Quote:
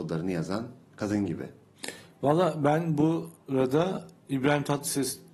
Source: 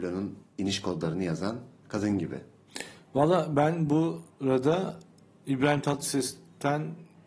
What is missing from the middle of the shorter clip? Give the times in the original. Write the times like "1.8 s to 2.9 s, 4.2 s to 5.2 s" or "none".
5.1 s to 5.4 s